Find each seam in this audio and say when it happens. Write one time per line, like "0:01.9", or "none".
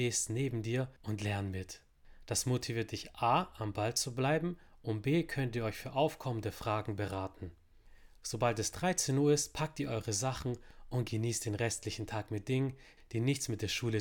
none